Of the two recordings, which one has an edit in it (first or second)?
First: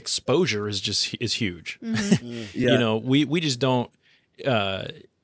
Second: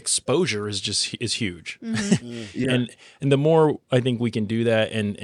second